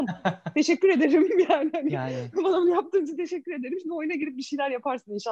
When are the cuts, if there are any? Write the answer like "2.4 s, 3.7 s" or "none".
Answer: none

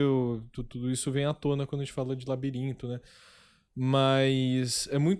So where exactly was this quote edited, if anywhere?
none

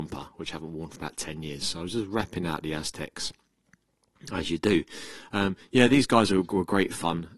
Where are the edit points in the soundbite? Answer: none

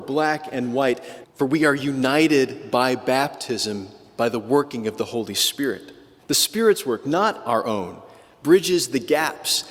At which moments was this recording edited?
1.2 s, 6.2 s

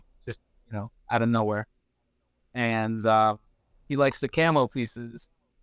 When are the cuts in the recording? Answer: none

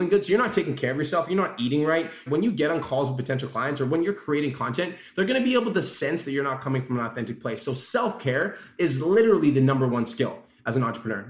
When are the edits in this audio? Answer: 2.3 s

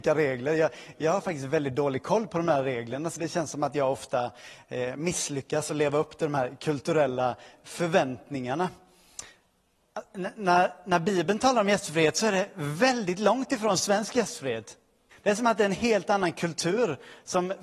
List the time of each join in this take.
3.2 s, 15.1 s

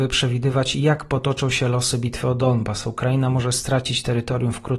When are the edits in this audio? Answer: none

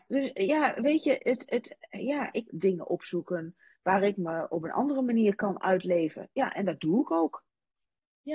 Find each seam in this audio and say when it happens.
1.2 s, 2.5 s

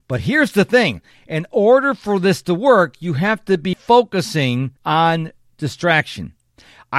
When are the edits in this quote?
3.7 s, 4.8 s

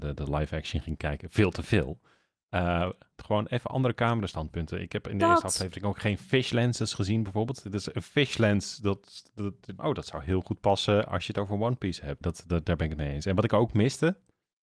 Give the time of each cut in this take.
3.1 s, 9.8 s, 12.2 s

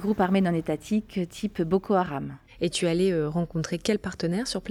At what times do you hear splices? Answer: none

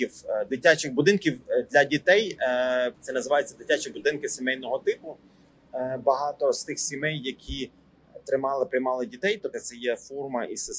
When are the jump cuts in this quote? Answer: 9.5 s

